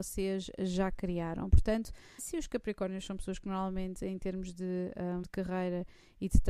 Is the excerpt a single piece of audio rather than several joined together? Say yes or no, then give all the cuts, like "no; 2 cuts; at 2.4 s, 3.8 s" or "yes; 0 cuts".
no; 2 cuts; at 2.2 s, 5.2 s